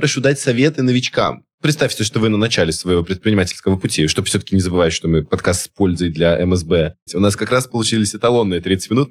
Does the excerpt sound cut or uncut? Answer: cut